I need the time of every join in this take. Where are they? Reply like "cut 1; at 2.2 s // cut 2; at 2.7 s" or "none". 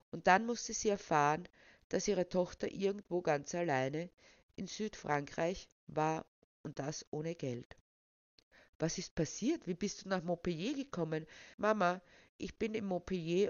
cut 1; at 11.5 s